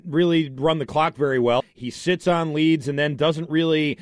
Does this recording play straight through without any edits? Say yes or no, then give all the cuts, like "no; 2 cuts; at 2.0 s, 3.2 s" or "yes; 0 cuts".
no; 1 cut; at 1.6 s